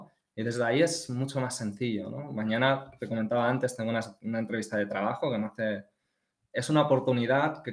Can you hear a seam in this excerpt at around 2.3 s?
no; 0 cuts

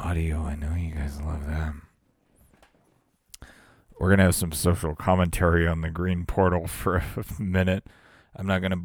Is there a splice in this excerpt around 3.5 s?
no; 0 cuts

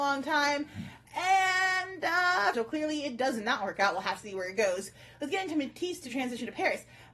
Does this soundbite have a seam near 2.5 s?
yes; 1 cut; at 2.5 s

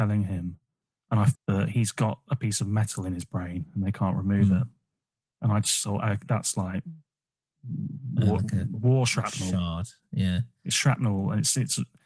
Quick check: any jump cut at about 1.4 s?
yes; 1 cut; at 1.4 s

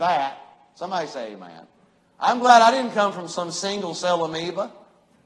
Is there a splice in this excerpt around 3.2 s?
no; 1 cut; at 2.0 s

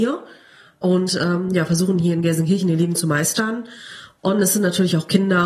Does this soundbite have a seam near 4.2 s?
yes; 1 cut; at 4.2 s

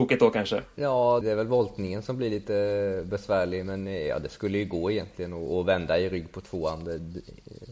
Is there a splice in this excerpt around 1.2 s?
yes; 1 cut; at 1.2 s

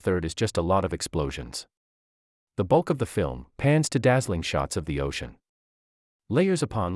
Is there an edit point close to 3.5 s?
yes; 1 cut; at 3.5 s

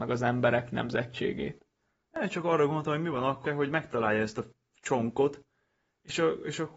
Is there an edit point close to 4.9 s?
no; 2 cuts; at 2.0 s, 3.5 s

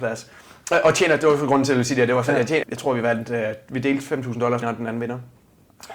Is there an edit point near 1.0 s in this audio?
no; 2 cuts; at 2.6 s, 4.6 s

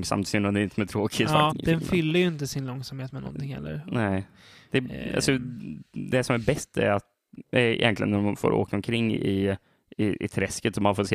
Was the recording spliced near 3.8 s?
no; 1 cut; at 1.5 s

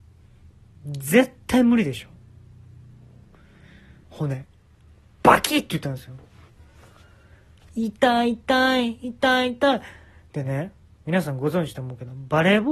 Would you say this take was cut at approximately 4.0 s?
yes; 1 cut; at 4.0 s

